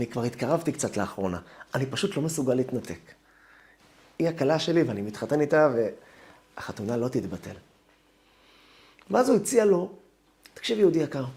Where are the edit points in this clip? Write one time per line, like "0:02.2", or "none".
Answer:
none